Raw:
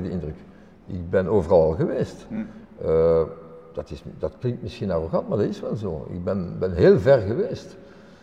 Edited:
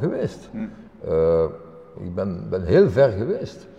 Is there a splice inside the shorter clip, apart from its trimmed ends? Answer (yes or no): yes